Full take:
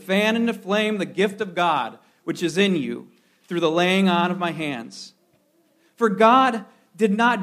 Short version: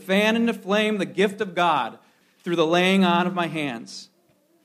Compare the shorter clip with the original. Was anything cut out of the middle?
yes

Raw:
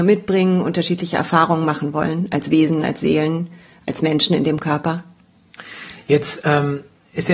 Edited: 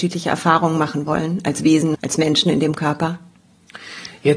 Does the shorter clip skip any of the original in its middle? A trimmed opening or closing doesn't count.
yes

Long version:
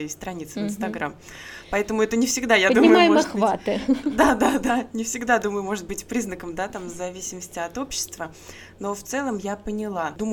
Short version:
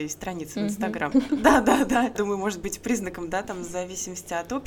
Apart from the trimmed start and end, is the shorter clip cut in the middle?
yes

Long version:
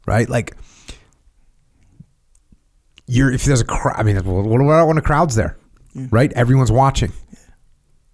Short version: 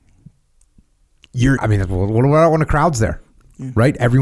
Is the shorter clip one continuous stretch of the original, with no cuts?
no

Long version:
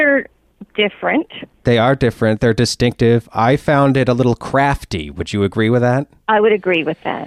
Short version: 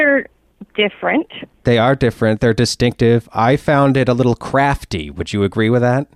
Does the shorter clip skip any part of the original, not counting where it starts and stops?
no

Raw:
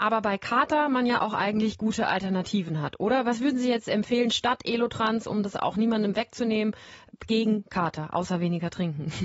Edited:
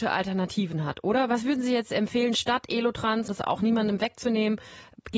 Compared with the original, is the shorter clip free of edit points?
no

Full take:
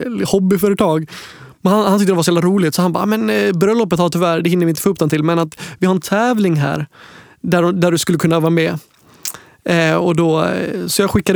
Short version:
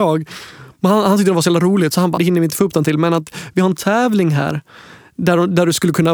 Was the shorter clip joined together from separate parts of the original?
yes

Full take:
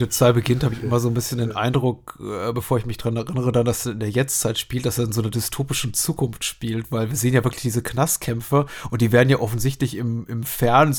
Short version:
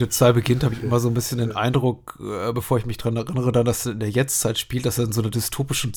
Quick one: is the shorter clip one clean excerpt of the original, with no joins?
yes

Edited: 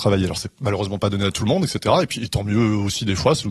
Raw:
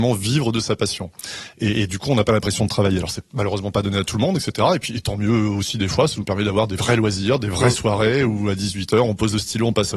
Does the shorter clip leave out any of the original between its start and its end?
no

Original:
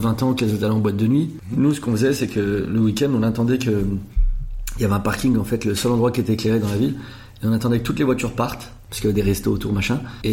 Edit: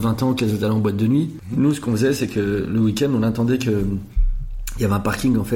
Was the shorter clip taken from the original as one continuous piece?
yes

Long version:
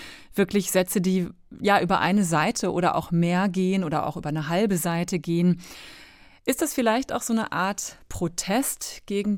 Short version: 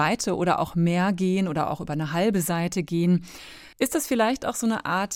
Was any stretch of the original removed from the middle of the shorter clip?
yes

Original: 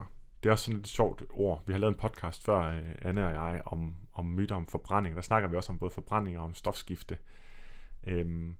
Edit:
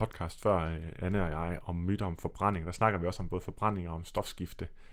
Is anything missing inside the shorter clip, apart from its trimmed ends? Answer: yes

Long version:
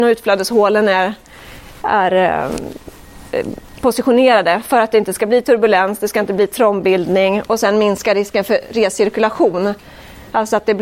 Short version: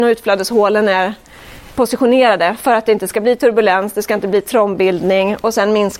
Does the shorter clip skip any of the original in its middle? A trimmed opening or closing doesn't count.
yes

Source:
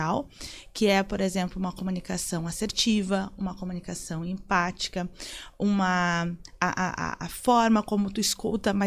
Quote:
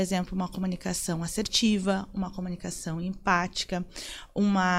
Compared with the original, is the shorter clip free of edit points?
yes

